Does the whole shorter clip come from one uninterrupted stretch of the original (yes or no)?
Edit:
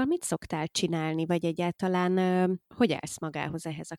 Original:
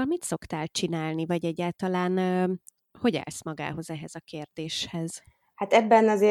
no